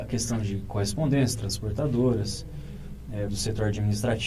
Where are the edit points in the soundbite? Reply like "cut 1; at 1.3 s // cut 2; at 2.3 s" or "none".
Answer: cut 1; at 3.3 s